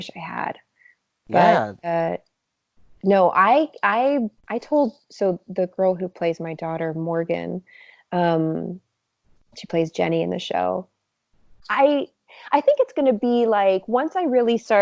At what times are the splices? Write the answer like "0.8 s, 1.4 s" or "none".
4.4 s, 11.6 s